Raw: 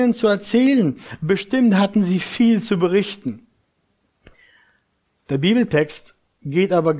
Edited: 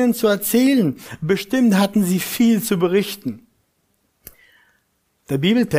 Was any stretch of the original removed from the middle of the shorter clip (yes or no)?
no